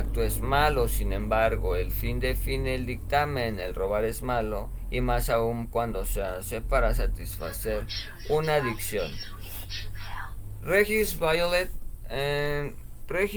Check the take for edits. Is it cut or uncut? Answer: uncut